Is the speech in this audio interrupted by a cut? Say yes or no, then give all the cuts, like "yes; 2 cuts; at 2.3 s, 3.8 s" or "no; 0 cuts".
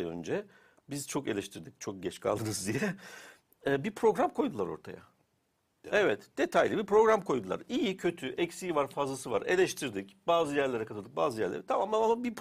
yes; 1 cut; at 5.8 s